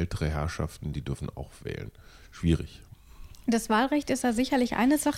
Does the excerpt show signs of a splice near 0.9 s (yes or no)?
yes